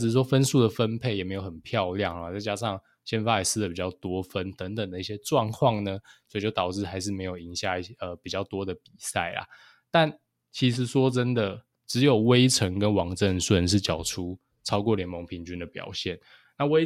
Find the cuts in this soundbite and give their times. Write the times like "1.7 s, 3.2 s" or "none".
11.7 s